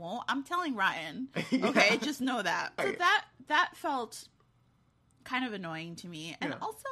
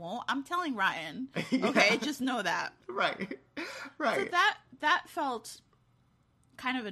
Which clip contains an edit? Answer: first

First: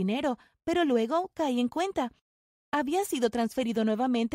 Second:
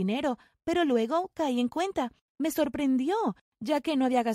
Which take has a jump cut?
second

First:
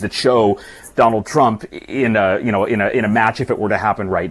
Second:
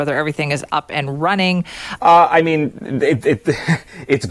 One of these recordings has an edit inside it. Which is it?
second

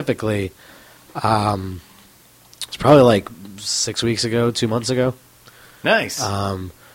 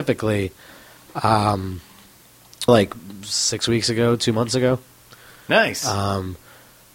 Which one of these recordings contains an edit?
second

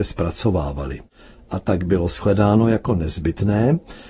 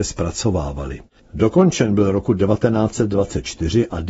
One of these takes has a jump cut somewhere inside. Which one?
second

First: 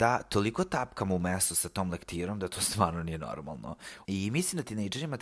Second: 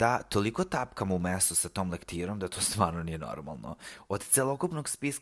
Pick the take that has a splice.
first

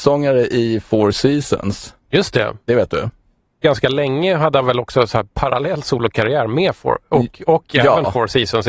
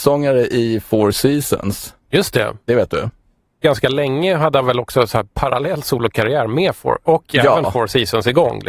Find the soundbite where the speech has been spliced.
second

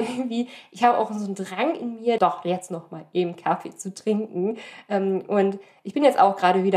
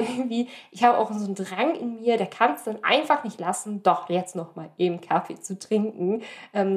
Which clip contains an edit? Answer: first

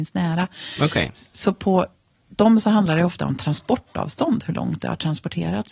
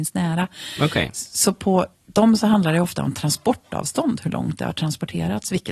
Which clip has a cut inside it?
second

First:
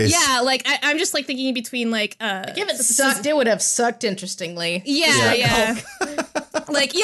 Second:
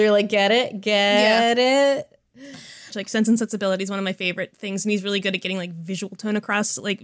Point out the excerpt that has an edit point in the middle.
second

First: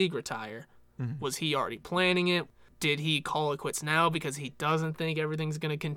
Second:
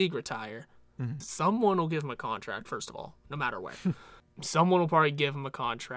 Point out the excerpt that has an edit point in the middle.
second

